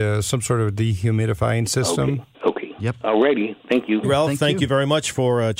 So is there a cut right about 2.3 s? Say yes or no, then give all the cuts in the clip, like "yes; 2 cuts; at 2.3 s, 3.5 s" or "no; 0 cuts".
yes; 2 cuts; at 2.3 s, 4.0 s